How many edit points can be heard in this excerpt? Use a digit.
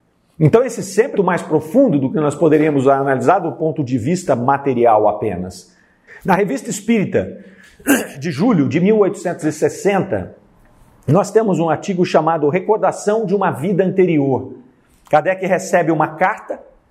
2